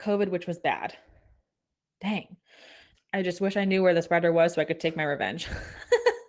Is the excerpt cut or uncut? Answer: cut